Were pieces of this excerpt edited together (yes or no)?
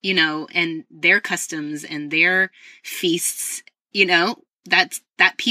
no